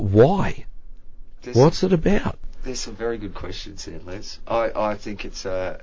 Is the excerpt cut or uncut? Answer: uncut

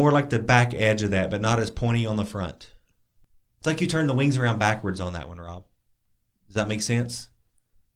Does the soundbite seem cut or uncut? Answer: uncut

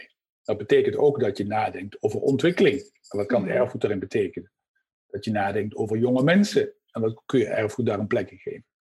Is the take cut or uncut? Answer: uncut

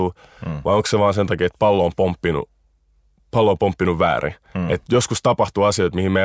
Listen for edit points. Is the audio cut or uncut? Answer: uncut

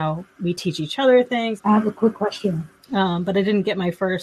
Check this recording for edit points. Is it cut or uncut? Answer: cut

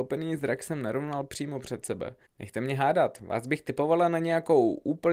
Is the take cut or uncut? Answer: cut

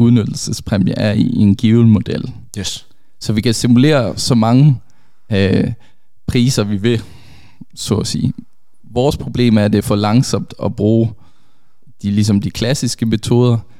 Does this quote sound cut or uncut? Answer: uncut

